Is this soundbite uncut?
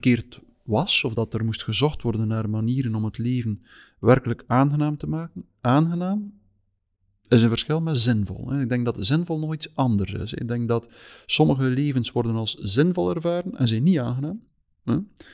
yes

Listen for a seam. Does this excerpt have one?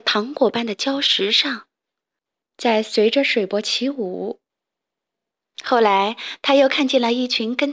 yes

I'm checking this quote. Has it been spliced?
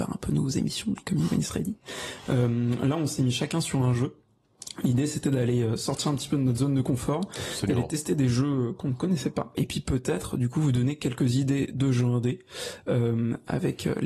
no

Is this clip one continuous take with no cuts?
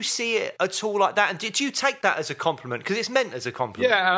yes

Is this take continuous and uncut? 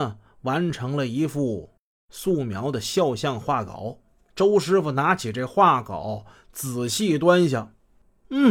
yes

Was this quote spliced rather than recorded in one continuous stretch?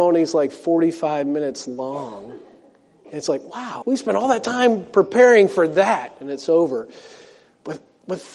yes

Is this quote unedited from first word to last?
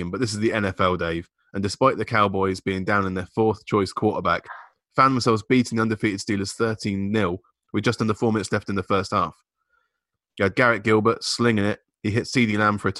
yes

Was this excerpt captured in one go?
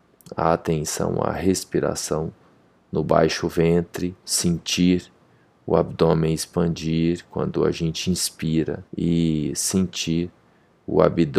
no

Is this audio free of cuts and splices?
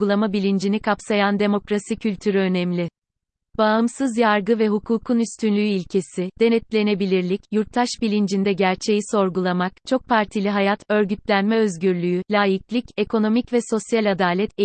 yes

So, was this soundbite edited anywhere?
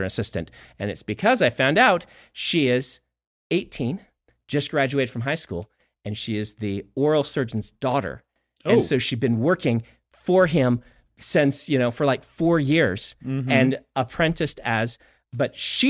no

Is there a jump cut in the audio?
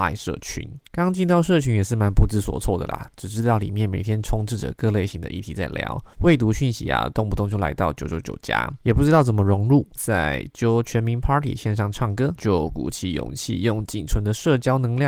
yes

